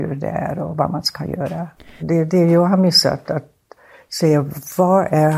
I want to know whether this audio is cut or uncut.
cut